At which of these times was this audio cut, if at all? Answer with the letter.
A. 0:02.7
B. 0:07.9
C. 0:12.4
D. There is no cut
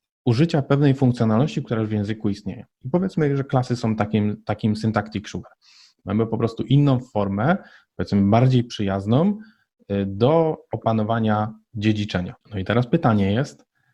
C